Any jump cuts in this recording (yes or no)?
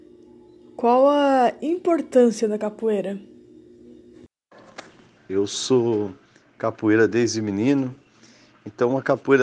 yes